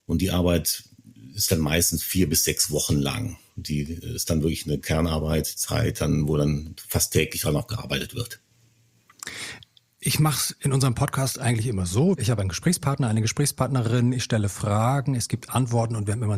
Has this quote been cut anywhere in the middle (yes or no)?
no